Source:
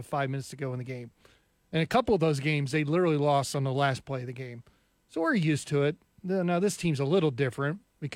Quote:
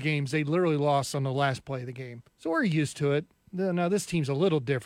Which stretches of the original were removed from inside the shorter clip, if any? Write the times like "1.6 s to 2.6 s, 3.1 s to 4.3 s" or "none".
4.7 s to 5.0 s

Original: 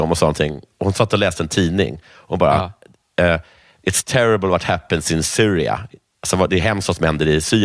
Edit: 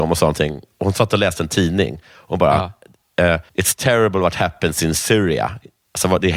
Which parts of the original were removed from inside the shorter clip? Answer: 3.5 s to 3.8 s

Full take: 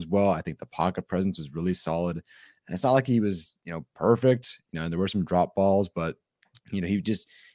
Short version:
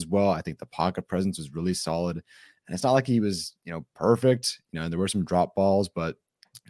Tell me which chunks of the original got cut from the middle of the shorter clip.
none

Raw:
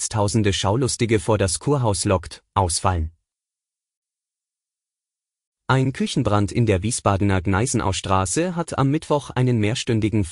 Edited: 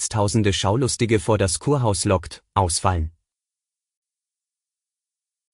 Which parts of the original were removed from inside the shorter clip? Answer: none

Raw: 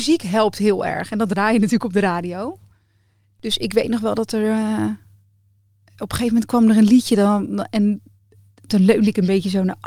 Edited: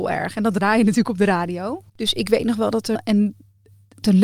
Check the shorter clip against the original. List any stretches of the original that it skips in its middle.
2.6 s to 3.3 s, 4.4 s to 7.6 s

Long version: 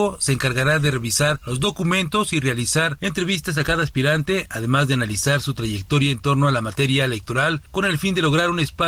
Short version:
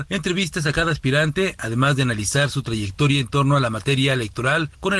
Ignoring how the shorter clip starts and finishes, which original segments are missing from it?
none

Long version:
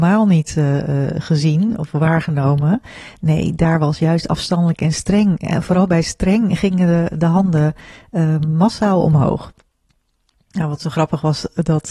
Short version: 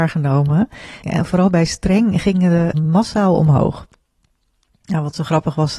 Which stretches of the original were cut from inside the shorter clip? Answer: 3.1 s to 5.4 s, 7.1 s to 8.4 s

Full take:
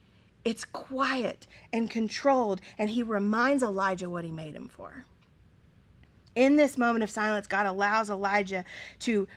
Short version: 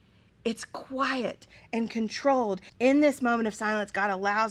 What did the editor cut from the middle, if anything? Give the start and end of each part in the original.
2.7 s to 6.3 s

